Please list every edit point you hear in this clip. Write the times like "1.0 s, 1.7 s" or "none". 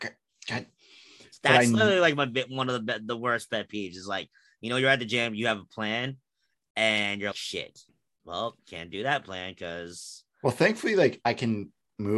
7.3 s